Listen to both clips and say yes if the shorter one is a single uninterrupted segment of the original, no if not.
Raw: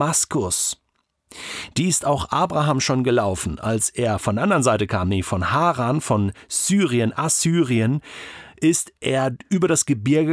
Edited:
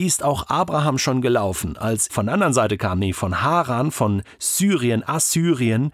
no